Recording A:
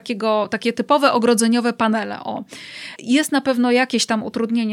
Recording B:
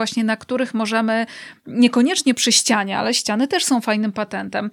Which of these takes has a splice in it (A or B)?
A